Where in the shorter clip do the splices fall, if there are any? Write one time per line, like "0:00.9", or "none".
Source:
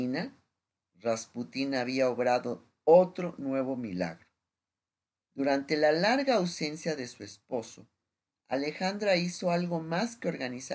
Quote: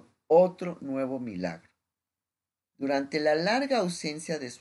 none